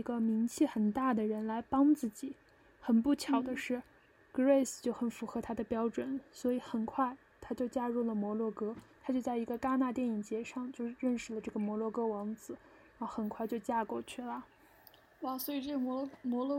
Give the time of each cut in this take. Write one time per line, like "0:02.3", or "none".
none